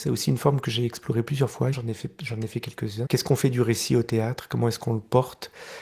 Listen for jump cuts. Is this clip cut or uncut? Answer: cut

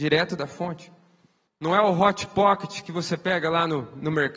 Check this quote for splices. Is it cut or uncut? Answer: cut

